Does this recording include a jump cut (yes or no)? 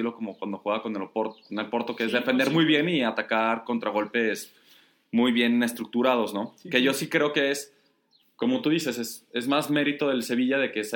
no